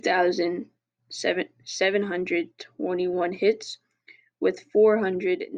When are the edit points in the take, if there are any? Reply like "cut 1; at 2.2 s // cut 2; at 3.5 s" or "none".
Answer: none